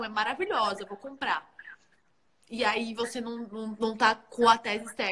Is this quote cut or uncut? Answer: uncut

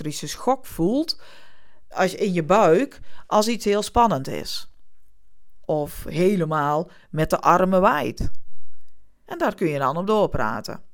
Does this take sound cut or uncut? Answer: cut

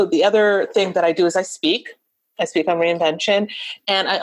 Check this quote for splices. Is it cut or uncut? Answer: uncut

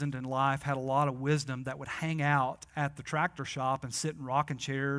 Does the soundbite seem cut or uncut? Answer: uncut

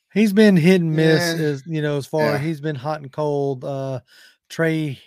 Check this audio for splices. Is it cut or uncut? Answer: uncut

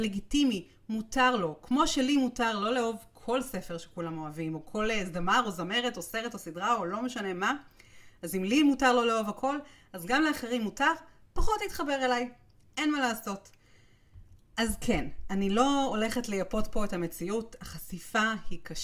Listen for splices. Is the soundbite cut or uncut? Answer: uncut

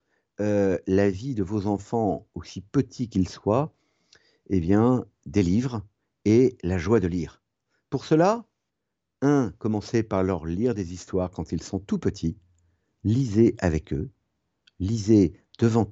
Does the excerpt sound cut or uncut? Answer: uncut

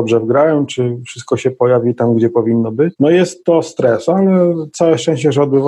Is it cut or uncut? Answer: uncut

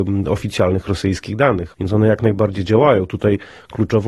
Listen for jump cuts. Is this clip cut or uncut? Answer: cut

